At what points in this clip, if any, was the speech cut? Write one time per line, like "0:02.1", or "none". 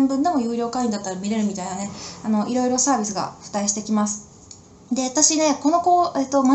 none